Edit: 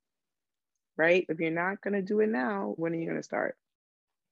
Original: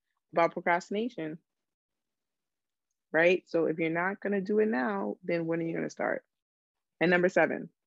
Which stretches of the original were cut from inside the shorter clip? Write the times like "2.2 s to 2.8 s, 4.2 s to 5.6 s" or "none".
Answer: 3.4 s to 3.7 s, 5.2 s to 5.4 s

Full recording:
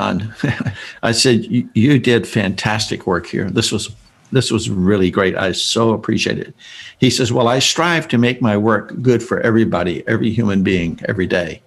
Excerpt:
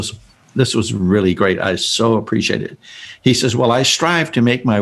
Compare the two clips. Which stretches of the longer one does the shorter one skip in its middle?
none

